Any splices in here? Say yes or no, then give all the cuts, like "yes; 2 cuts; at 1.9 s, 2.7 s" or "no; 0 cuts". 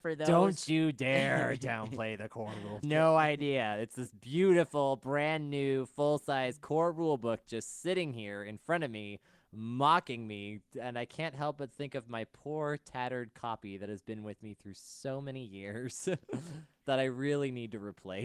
yes; 1 cut; at 2.8 s